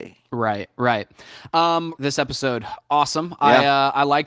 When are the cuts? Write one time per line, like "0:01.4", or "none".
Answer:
0:02.0